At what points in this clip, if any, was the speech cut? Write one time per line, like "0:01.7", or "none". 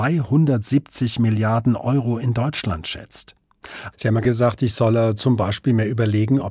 0:03.9